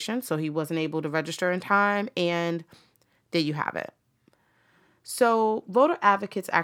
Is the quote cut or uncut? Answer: uncut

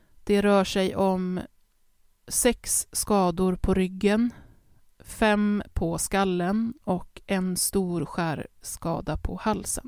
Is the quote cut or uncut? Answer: uncut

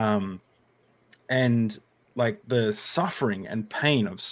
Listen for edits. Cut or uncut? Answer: uncut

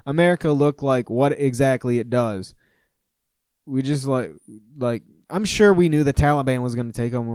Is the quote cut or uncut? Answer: uncut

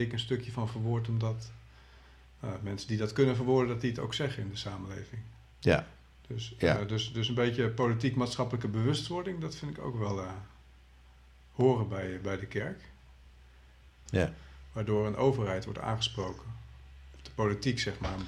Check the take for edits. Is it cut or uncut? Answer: cut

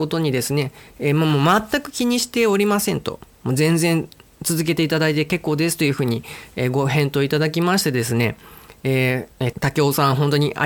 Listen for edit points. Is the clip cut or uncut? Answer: cut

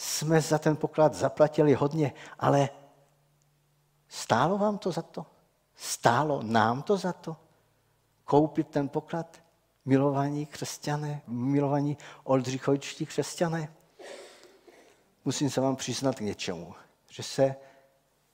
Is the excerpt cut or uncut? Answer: cut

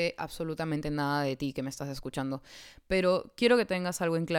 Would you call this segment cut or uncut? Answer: uncut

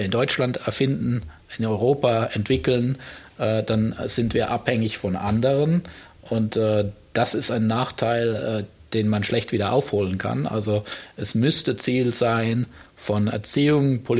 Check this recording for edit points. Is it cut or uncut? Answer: uncut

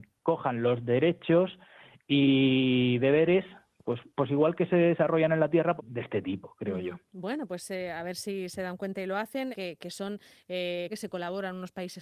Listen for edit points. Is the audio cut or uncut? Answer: cut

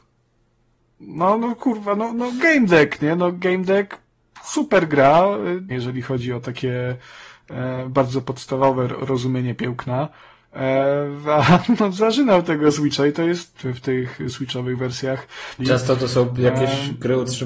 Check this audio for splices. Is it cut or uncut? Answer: cut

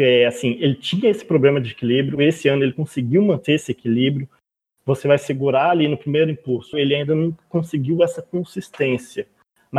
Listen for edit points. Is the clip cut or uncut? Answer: cut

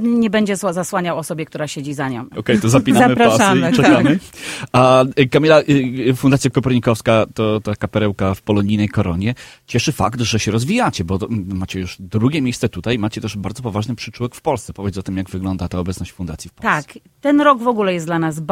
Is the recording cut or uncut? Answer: cut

